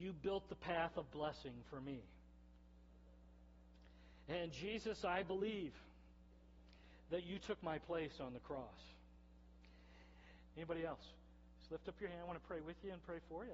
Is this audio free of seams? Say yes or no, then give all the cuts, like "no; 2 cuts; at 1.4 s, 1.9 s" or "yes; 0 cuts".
no; 1 cut; at 10.5 s